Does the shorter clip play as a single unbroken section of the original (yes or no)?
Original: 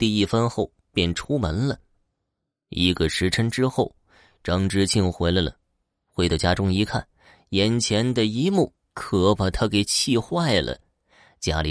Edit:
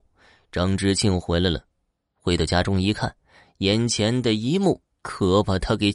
yes